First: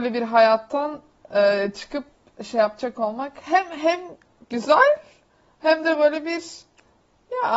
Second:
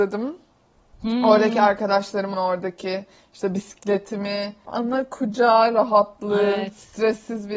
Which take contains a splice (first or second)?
second